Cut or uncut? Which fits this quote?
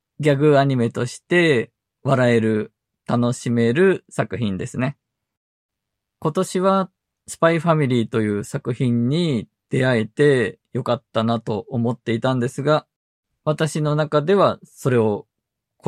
uncut